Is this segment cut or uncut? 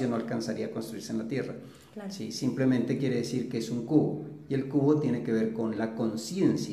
uncut